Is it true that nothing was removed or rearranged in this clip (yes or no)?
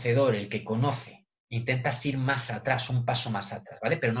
yes